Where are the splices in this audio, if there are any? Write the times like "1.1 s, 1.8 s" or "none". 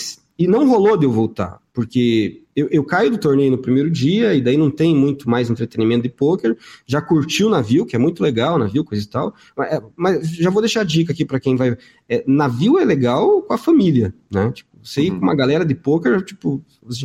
none